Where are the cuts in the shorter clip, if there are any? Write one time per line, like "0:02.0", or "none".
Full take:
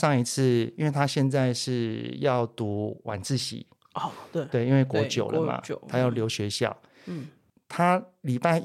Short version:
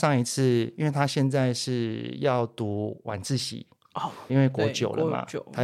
0:04.3